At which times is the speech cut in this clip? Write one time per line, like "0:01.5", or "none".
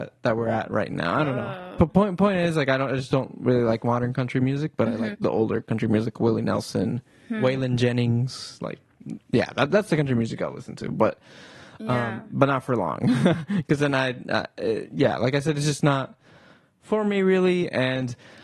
0:05.1